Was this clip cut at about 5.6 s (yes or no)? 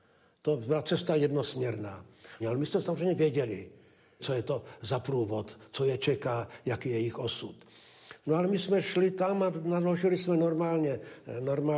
no